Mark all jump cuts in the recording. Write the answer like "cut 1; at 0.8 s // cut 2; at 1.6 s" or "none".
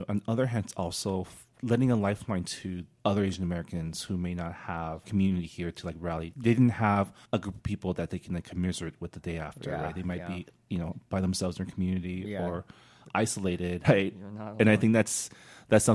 cut 1; at 7.2 s // cut 2; at 13.8 s